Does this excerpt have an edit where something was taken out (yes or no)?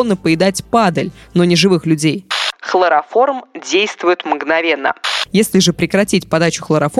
yes